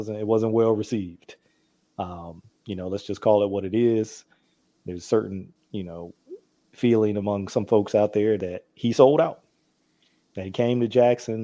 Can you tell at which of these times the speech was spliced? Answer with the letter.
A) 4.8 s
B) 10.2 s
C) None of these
B